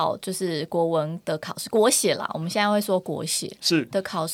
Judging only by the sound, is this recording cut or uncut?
uncut